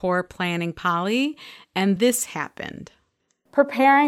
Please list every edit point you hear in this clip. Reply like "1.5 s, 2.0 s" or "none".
2.0 s